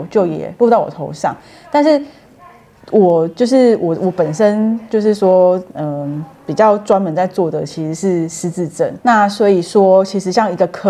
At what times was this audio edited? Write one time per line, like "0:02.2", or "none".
0:09.0